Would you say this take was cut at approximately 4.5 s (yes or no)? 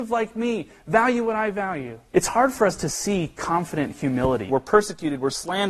yes